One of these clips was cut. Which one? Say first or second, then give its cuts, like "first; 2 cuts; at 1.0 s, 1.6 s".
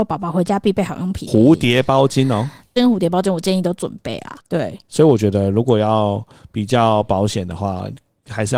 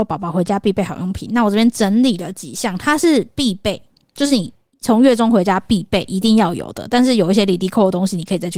first; 3 cuts; at 1.3 s, 2.8 s, 4.4 s